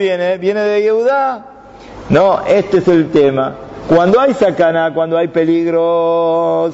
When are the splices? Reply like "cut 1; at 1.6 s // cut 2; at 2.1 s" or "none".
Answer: none